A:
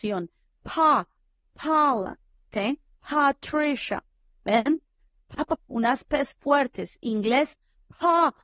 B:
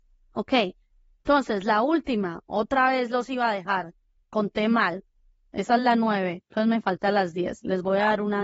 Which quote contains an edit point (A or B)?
A